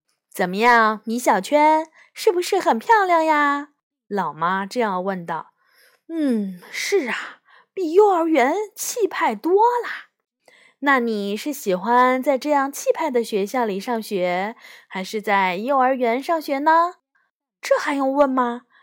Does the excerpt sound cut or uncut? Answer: uncut